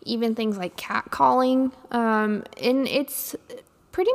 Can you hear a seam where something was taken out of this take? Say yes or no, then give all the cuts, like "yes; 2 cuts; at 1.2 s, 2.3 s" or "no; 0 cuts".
no; 0 cuts